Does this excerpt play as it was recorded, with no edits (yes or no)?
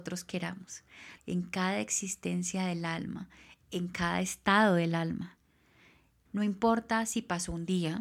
no